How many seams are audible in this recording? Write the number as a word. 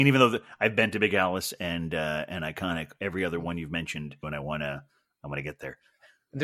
one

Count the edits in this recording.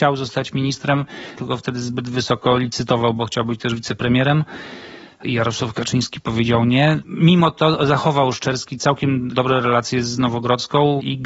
one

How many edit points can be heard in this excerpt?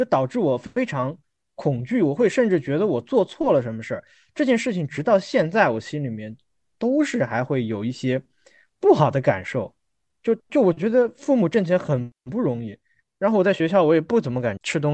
zero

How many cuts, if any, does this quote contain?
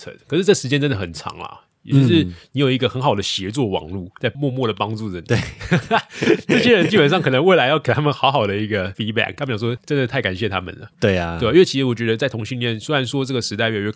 zero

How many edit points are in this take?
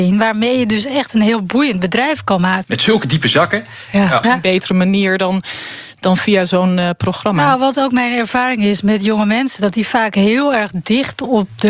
two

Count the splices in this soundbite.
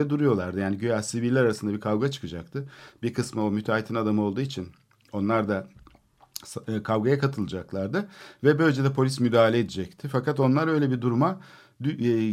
zero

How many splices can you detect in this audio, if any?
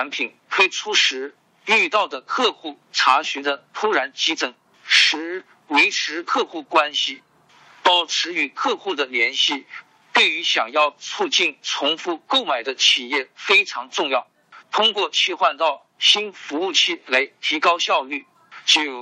two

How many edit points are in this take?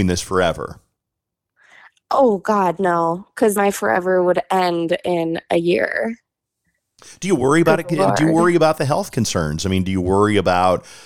one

